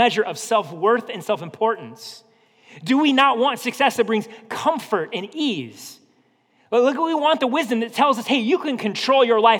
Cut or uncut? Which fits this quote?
uncut